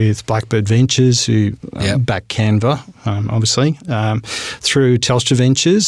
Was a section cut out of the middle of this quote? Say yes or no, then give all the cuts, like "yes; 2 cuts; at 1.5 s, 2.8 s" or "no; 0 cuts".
no; 0 cuts